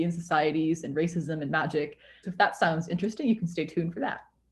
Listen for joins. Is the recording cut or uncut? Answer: cut